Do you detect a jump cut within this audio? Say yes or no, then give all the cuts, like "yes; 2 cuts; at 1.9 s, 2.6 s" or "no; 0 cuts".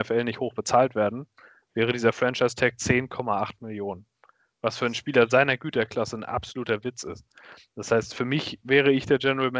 no; 0 cuts